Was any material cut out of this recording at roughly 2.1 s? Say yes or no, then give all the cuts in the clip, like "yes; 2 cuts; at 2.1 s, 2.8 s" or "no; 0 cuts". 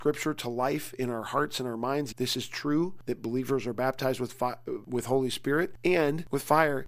yes; 1 cut; at 2.1 s